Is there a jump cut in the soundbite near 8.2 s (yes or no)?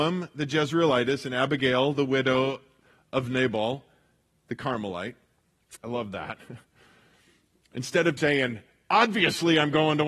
yes